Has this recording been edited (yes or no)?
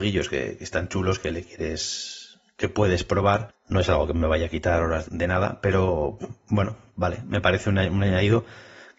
yes